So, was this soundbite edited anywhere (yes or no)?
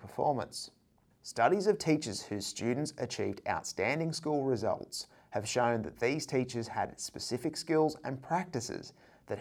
yes